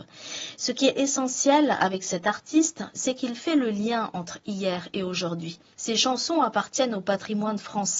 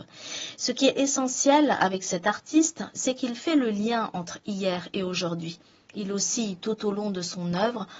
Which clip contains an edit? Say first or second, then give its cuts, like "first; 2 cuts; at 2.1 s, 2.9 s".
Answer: first; 1 cut; at 5.7 s